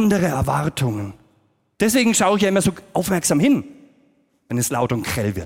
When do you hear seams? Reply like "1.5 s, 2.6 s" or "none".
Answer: 1.7 s

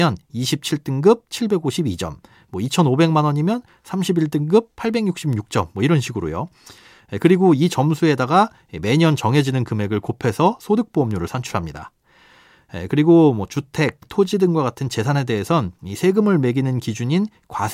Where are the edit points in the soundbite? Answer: 14.0 s

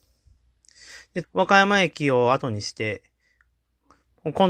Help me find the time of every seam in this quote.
1.2 s

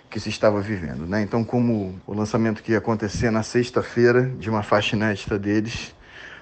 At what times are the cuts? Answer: 2.0 s

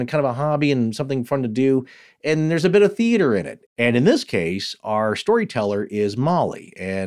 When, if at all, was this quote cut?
3.7 s

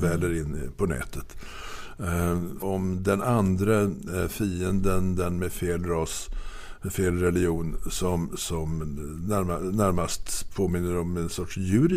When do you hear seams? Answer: 2.6 s

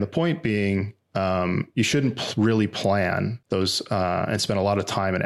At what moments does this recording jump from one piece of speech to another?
none

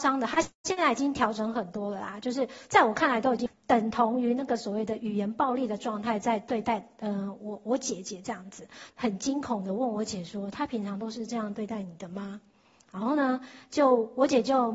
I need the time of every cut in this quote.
8.9 s

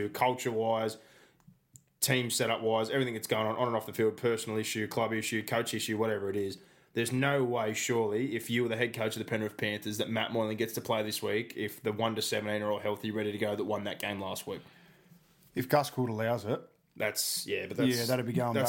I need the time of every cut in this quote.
none

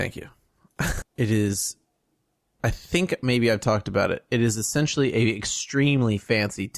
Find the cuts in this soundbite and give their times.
1.0 s

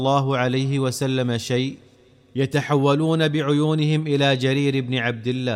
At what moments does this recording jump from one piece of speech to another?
none

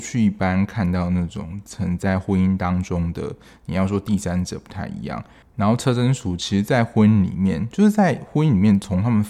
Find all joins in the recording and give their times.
5.4 s

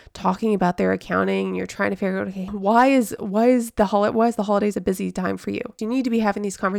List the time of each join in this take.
2.5 s, 5.8 s

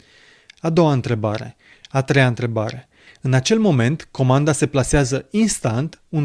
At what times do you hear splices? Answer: 1.8 s, 3.1 s

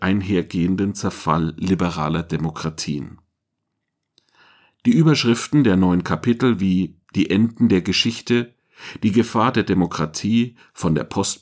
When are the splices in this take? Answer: 7.0 s

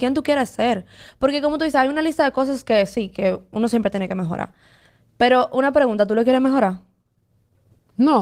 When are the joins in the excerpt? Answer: none

